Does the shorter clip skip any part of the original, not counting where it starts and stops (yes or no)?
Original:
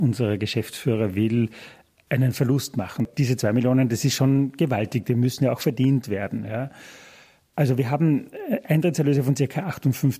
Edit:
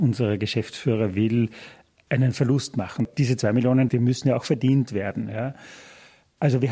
yes